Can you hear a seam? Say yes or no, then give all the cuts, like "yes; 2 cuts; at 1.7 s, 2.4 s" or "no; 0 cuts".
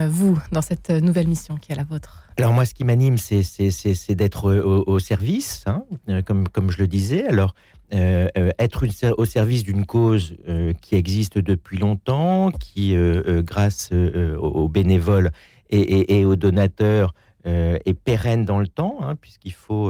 yes; 1 cut; at 2.3 s